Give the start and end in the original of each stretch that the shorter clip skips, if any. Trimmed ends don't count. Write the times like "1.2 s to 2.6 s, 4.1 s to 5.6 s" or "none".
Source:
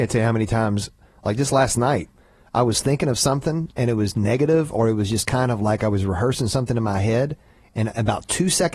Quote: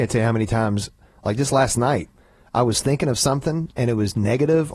none